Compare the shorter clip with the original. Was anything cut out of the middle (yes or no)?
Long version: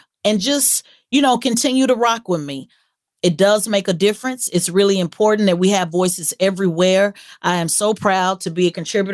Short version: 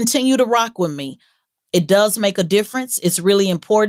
no